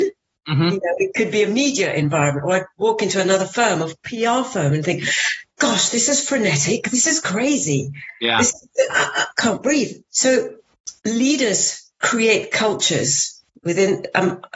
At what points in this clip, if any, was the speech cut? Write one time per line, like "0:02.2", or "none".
0:11.0